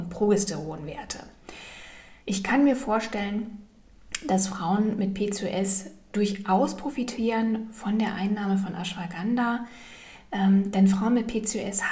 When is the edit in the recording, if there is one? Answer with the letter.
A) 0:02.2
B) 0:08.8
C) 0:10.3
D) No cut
A